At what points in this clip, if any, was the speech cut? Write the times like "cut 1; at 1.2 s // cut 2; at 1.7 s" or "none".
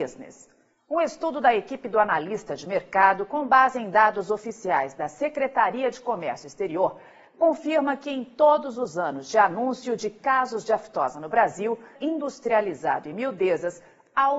cut 1; at 11.9 s